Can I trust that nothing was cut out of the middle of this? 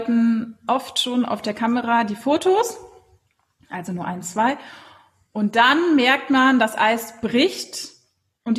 yes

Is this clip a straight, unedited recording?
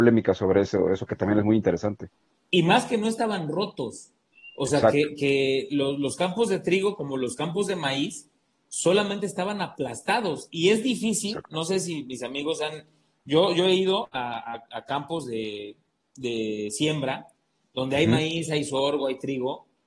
yes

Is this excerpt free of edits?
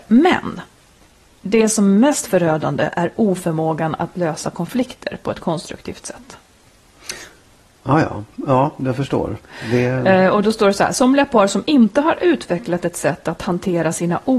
yes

